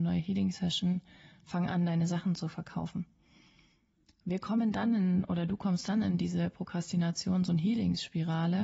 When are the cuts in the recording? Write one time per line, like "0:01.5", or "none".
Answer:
none